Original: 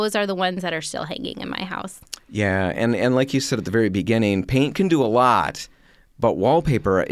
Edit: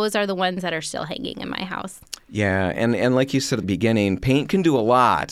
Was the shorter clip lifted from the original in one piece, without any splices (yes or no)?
no